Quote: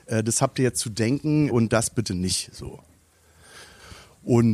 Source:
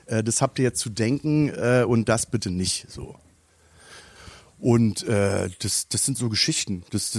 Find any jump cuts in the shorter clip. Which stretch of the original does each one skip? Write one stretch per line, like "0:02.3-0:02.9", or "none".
0:01.5-0:01.9